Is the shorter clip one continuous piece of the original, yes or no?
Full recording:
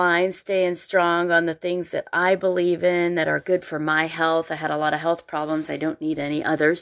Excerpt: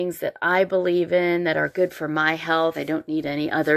no